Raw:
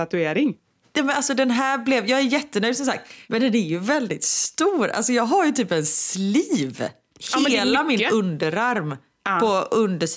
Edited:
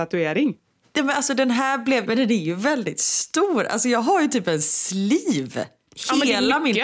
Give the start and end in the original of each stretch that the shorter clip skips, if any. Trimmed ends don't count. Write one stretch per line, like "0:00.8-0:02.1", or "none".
0:02.0-0:03.3